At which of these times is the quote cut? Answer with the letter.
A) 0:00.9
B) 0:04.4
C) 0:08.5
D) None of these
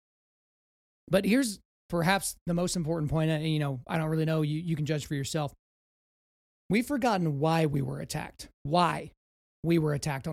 C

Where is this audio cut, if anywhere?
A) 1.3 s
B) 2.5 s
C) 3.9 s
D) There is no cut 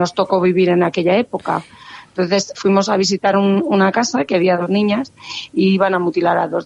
B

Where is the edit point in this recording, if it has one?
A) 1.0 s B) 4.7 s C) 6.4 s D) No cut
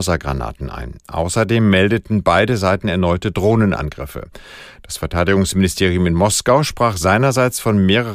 B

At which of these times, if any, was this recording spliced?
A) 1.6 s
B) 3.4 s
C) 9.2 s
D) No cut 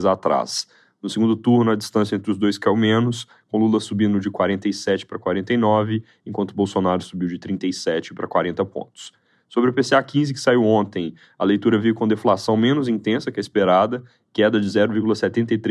D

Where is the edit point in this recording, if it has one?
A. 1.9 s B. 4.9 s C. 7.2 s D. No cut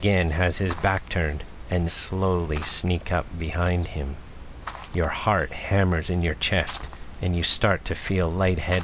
A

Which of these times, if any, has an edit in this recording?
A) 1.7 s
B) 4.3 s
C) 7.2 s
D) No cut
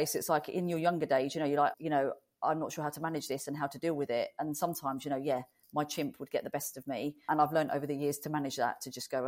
A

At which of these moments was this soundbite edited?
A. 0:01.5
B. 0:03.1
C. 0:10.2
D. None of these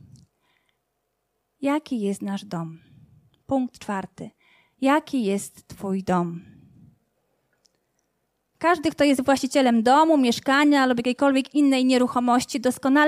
D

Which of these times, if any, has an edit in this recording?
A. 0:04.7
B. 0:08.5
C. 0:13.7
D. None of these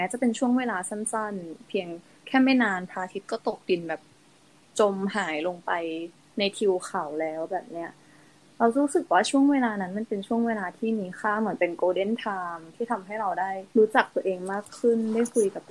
C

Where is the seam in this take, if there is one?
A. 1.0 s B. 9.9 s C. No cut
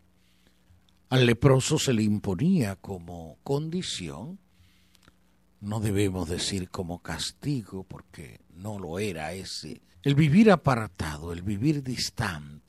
B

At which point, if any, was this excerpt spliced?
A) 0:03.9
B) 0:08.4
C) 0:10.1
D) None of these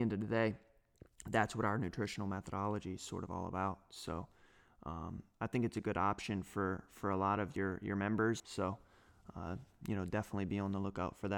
B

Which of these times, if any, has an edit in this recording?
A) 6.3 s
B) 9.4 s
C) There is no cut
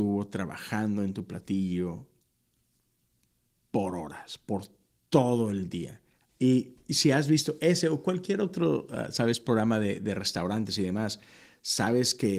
A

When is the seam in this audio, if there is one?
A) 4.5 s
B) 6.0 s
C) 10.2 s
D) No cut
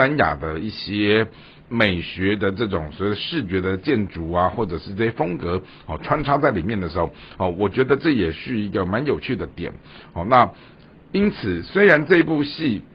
D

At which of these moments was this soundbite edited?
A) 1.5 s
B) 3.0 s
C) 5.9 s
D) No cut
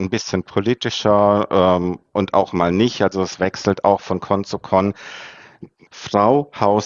C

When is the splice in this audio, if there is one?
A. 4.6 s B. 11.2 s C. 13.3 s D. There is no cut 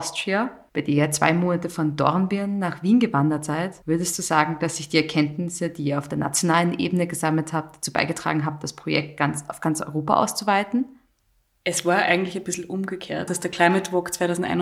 C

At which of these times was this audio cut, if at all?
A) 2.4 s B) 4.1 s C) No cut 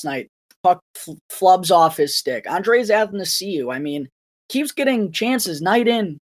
C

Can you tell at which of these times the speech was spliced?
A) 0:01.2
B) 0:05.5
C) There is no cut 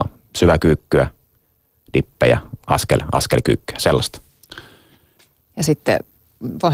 B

